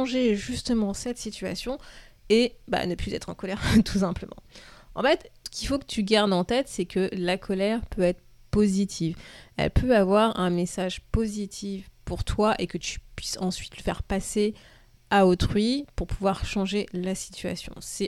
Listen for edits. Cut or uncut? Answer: uncut